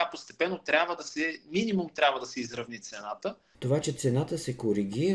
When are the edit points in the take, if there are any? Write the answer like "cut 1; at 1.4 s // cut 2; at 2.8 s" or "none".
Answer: cut 1; at 3.5 s